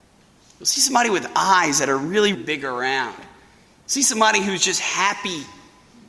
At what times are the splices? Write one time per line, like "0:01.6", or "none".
0:02.3

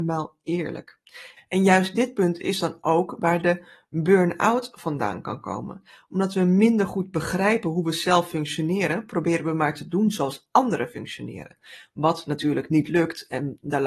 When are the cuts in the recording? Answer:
0:01.4

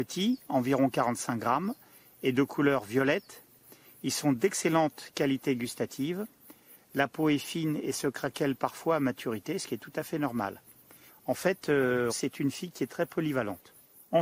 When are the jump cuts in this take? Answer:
0:11.1
0:12.1

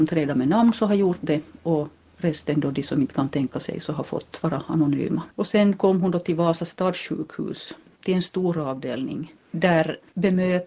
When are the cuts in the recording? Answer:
0:05.3

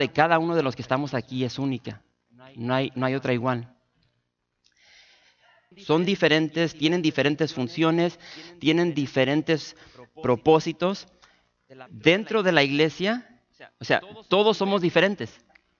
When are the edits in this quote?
0:05.7
0:11.9

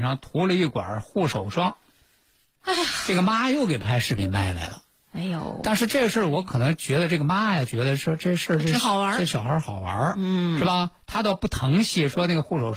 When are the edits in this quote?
none

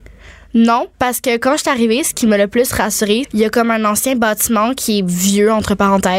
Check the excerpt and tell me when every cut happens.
0:00.9
0:03.2

